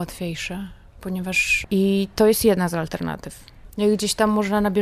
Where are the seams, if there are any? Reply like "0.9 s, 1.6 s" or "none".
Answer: 1.6 s, 3.7 s